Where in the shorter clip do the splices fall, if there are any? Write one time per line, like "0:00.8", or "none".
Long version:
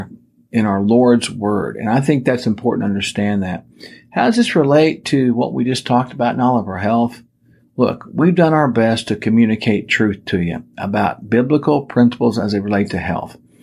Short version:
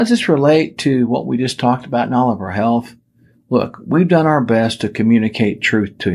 none